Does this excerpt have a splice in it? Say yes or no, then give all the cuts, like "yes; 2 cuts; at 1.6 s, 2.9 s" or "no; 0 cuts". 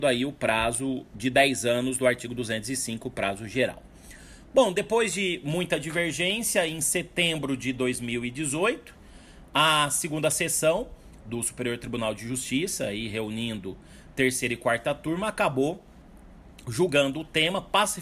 no; 0 cuts